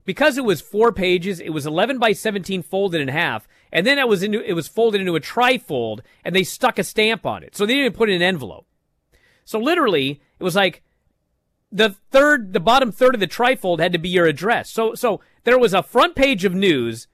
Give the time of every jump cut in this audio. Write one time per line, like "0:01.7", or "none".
none